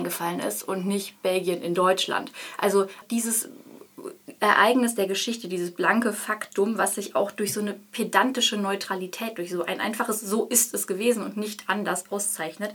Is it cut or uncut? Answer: cut